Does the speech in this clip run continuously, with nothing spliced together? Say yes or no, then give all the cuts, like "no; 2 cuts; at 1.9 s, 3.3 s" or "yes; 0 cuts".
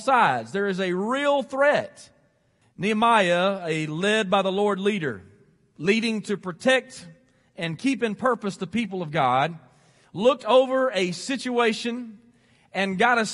no; 1 cut; at 2.6 s